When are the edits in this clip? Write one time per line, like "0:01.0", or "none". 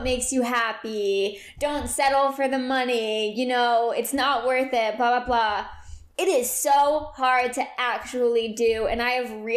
none